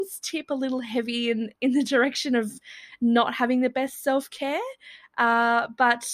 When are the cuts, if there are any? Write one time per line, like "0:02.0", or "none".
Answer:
none